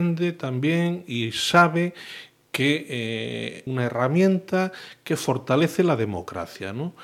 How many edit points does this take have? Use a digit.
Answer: 1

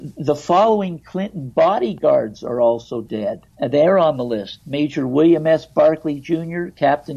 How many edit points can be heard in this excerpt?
1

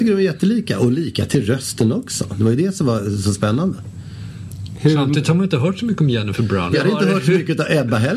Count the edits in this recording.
1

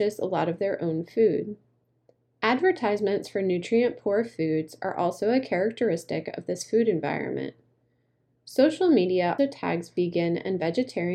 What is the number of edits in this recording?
2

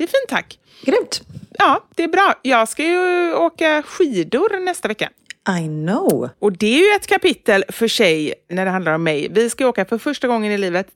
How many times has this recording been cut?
1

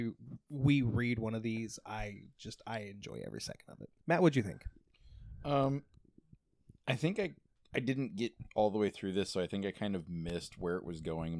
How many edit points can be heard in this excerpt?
1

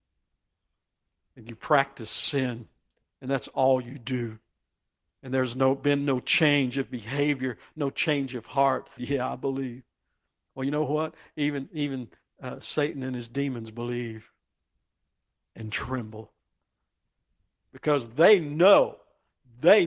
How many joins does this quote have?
1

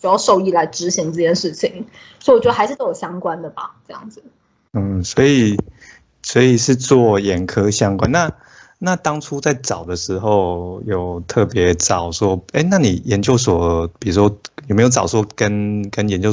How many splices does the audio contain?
1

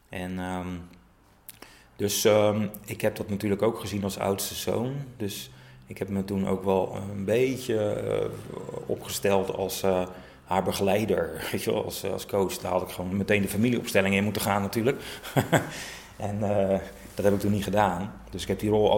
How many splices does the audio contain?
0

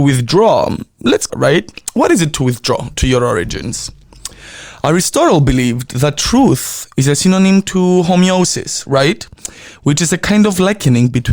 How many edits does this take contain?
1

